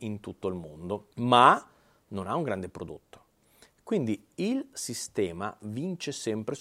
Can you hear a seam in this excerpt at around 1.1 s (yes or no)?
yes